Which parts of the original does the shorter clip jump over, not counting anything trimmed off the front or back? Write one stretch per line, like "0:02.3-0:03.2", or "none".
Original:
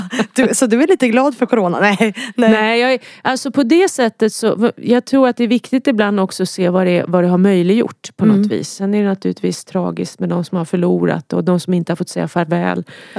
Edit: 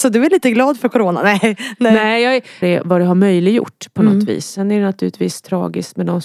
0:03.2-0:06.9